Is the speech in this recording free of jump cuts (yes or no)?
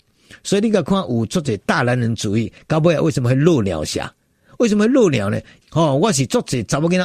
no